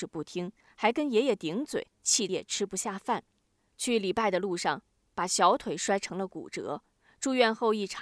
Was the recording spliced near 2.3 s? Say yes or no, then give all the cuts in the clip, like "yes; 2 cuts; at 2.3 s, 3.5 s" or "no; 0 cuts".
yes; 1 cut; at 2.3 s